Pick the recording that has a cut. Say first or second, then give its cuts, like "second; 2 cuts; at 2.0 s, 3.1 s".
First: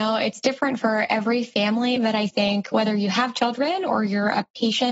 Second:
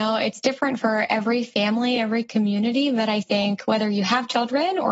first; 1 cut; at 2.0 s